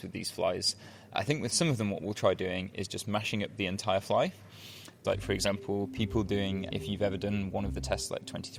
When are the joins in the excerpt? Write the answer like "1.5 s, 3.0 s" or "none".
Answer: 5.0 s, 6.7 s